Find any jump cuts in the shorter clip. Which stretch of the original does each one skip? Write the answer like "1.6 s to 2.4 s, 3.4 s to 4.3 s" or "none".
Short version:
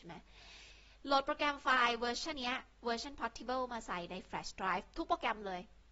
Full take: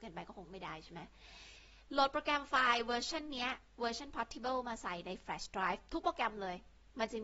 3.2 s to 3.3 s